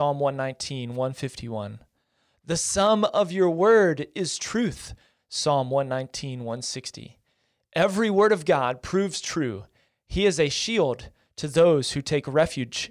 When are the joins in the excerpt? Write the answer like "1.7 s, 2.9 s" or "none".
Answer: none